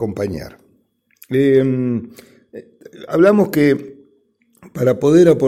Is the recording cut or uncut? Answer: uncut